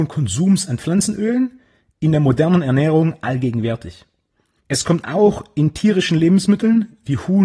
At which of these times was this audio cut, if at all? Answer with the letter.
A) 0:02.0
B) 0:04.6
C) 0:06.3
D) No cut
B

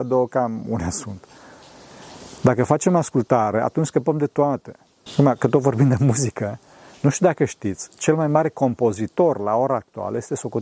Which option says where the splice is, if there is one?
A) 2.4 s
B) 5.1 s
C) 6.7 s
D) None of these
B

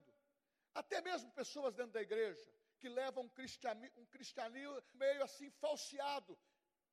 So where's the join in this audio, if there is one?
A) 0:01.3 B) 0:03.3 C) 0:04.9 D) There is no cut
C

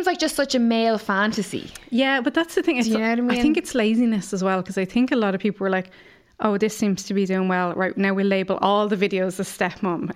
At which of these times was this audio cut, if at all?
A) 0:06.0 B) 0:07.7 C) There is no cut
C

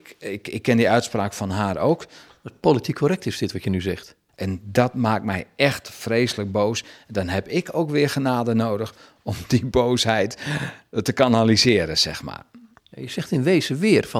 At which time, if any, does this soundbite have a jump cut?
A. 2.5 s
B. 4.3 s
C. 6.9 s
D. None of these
B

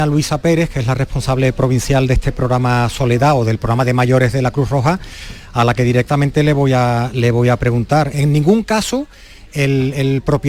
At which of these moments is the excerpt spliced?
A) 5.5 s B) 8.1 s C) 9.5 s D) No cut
B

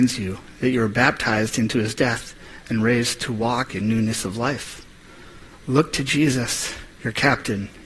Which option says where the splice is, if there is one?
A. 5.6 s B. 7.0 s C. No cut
B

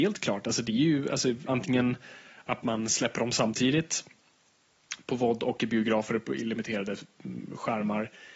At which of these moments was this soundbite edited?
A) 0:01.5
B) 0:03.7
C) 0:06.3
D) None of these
A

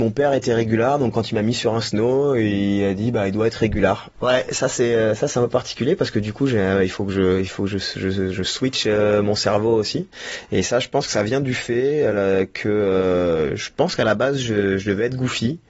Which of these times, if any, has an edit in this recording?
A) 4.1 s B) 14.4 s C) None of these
A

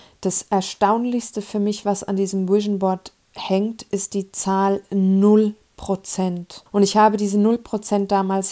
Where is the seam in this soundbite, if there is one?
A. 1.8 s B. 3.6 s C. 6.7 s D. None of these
C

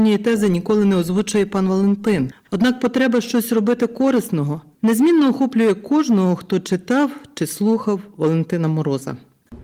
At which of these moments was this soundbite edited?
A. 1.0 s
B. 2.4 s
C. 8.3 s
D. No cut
B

